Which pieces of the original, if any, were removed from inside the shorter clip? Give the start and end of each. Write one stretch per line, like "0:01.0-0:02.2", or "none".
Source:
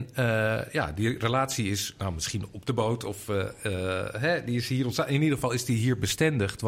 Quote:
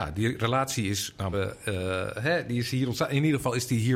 0:02.1-0:03.3